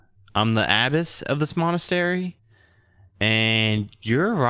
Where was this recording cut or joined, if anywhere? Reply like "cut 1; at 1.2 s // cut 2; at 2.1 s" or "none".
none